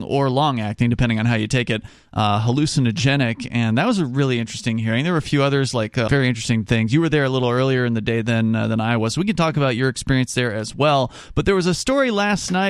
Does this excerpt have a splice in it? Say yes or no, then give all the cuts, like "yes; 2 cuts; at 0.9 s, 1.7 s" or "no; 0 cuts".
yes; 1 cut; at 6.1 s